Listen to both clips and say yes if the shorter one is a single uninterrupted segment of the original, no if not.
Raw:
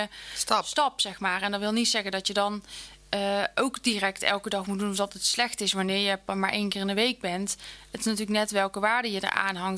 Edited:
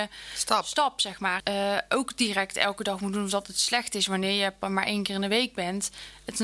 no